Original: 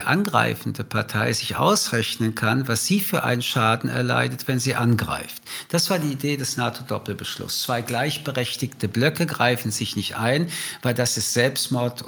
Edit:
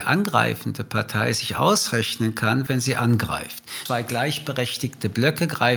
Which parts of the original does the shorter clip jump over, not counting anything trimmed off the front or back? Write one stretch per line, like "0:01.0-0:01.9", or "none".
0:02.7-0:04.5
0:05.6-0:07.6